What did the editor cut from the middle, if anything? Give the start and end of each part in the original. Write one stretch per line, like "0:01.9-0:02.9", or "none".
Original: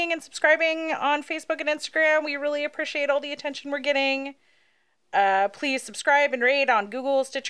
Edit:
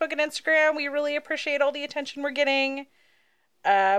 none